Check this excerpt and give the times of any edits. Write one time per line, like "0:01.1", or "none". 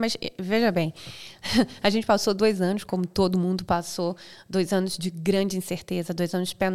none